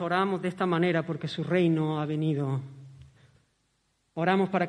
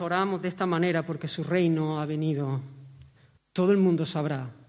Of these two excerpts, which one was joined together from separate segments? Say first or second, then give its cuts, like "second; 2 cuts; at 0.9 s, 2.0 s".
second; 1 cut; at 3.4 s